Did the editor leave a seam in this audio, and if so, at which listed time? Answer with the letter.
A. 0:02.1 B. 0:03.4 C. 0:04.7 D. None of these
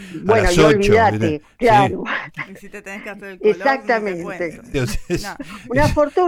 C